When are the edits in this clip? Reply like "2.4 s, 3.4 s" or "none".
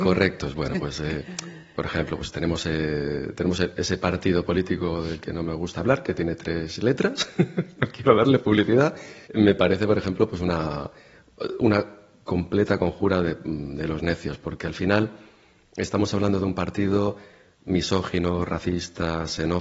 9.2 s